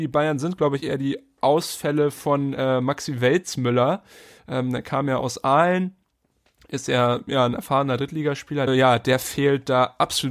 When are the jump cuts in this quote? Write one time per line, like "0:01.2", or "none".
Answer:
0:08.7